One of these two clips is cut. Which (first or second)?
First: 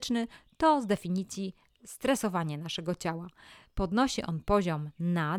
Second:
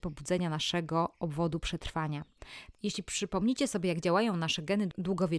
second